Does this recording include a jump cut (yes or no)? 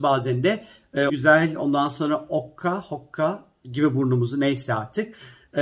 yes